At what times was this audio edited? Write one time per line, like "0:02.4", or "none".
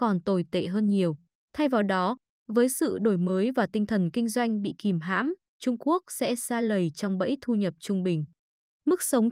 0:01.4
0:05.5